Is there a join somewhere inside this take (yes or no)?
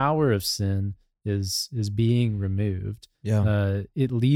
yes